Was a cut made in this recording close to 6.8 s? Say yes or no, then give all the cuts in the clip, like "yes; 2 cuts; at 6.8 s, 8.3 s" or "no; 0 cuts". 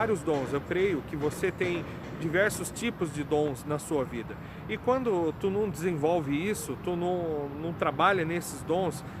no; 0 cuts